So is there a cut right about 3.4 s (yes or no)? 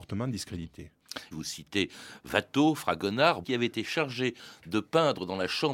yes